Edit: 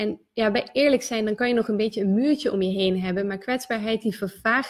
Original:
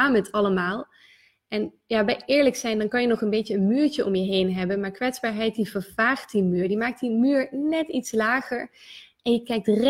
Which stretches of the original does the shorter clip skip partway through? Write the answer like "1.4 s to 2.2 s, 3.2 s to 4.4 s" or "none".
none

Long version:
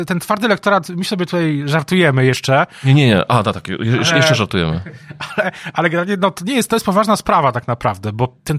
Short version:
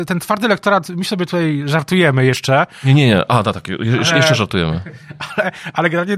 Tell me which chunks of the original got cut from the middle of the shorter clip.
none

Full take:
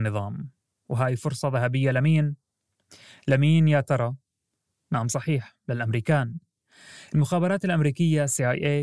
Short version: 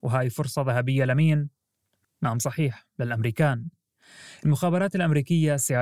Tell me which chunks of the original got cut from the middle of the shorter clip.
2.9 s to 4.7 s

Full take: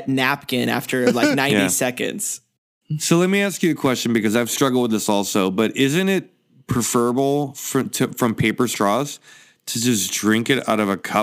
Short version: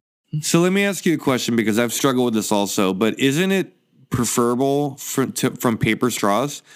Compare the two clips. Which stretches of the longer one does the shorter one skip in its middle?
none

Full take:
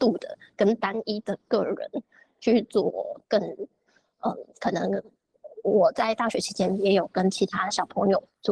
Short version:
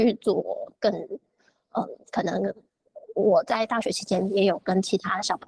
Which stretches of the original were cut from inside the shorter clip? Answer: none

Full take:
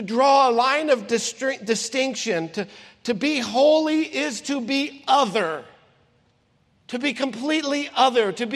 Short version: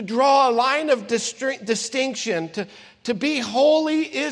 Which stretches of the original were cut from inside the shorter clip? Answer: none

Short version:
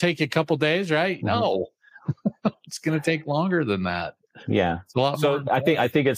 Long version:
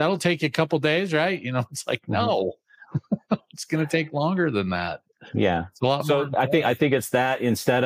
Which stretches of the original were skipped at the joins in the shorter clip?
1.4 s to 2.0 s

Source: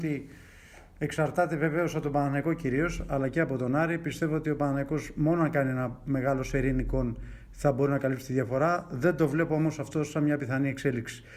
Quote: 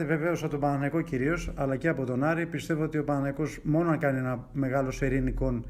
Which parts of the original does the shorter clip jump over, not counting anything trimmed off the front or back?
none

